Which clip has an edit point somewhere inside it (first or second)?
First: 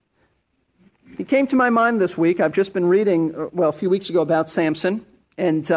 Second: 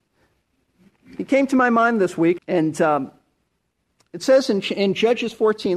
second